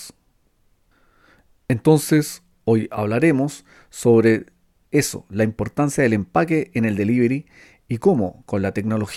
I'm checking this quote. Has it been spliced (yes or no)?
no